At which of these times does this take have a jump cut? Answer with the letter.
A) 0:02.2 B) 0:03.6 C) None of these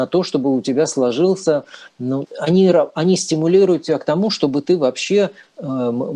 A